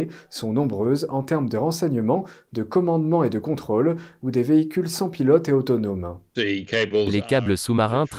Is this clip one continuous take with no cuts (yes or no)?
no